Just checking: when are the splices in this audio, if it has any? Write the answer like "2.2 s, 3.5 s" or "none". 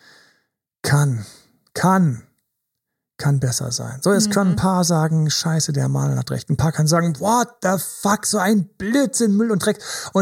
none